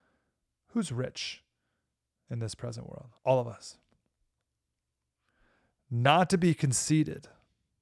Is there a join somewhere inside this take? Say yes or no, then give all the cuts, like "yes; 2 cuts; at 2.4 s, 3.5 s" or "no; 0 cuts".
yes; 1 cut; at 3.2 s